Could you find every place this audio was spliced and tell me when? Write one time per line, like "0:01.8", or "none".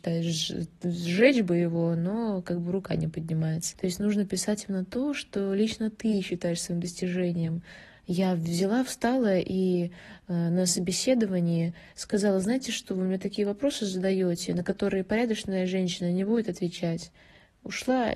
0:03.7
0:07.9